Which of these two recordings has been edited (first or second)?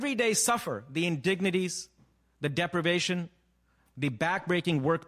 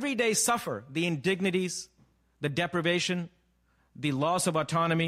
first